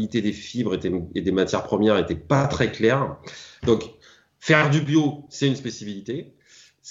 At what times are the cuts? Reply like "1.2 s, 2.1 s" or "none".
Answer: 3.6 s